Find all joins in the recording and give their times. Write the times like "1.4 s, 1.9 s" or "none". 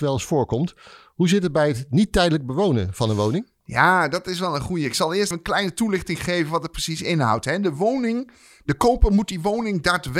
5.3 s